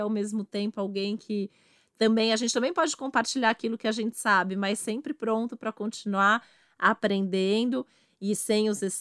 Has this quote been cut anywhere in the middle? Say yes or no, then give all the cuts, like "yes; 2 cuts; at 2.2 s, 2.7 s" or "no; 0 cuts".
no; 0 cuts